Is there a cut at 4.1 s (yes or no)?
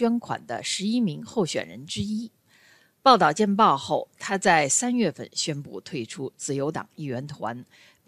no